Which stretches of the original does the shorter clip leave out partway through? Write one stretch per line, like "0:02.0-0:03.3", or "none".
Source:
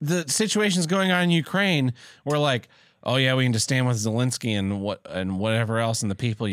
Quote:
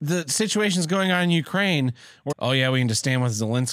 0:02.3-0:03.0